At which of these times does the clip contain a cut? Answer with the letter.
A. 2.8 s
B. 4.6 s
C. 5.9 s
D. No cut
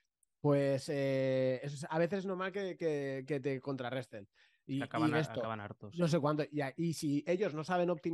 B